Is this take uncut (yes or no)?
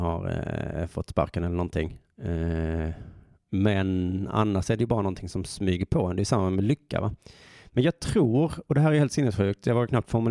yes